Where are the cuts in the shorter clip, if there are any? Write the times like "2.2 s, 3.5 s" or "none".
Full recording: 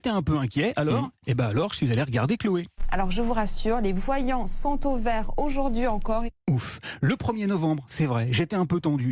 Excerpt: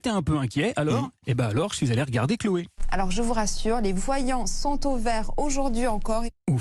none